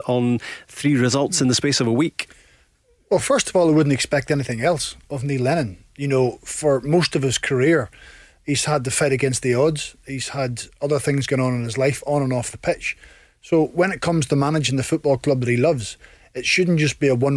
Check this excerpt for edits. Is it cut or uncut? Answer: uncut